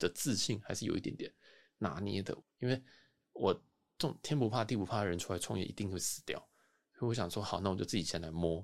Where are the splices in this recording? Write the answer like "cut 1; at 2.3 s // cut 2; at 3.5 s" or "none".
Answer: cut 1; at 2.4 s